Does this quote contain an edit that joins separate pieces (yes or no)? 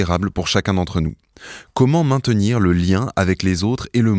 no